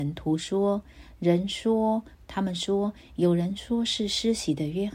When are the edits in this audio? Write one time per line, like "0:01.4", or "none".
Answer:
0:02.1